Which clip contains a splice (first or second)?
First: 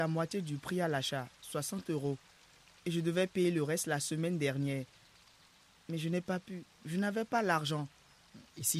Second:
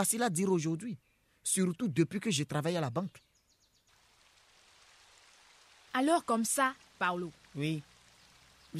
second